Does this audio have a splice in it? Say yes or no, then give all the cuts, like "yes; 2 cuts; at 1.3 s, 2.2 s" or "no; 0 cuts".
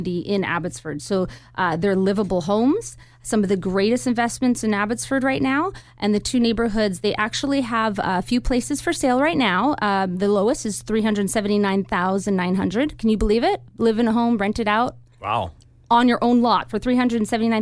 no; 0 cuts